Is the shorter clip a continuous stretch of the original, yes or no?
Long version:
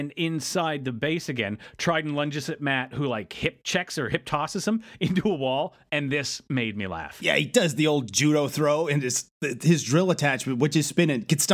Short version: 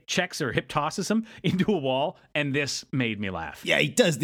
yes